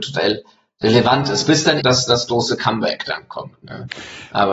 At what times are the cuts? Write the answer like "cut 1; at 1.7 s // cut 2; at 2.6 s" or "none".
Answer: cut 1; at 1.8 s